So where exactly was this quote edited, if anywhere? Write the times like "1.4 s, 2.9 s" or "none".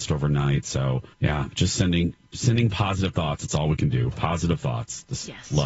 1.1 s